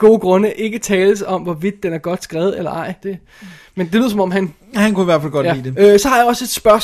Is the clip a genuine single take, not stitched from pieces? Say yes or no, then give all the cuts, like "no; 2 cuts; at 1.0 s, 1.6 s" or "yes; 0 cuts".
no; 2 cuts; at 3.0 s, 5.7 s